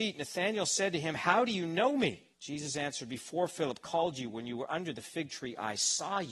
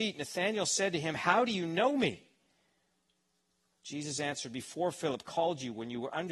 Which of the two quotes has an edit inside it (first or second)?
first